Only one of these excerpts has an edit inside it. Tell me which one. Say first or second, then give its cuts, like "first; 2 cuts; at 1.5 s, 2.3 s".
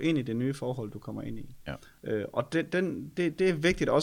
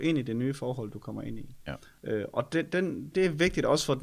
second; 1 cut; at 3.1 s